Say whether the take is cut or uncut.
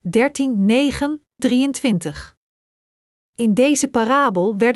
cut